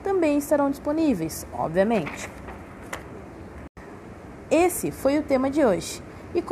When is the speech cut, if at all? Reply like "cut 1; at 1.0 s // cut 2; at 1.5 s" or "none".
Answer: cut 1; at 1.5 s // cut 2; at 4.5 s